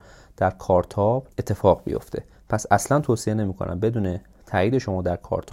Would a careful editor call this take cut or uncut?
cut